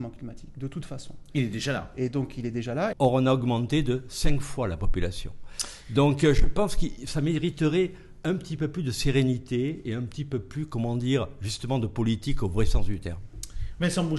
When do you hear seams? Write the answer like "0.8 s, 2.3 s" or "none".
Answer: 2.9 s